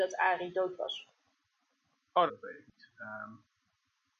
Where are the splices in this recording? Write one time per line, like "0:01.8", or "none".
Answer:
0:02.3